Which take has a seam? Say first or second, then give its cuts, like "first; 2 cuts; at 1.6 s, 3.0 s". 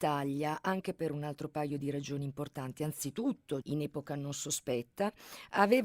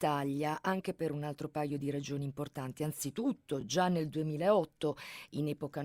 first; 1 cut; at 3.6 s